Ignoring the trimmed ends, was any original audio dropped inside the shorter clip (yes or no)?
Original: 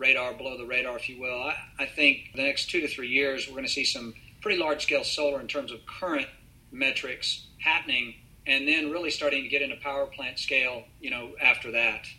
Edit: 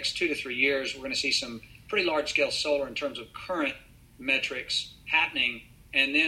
no